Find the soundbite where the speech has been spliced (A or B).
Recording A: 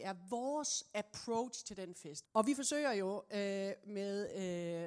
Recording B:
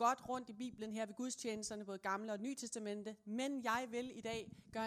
A